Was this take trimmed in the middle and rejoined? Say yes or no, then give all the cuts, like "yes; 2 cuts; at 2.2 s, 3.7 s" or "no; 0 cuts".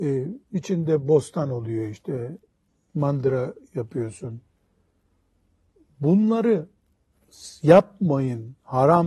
no; 0 cuts